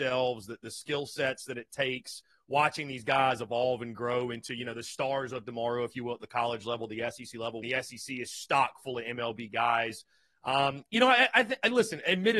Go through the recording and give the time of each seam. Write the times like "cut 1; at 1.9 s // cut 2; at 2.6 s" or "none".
cut 1; at 7.6 s